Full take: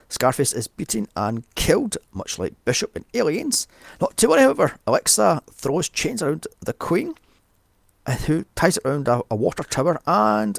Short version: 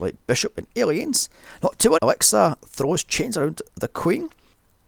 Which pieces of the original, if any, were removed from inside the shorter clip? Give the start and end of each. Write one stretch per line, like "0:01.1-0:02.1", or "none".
0:04.3-0:04.8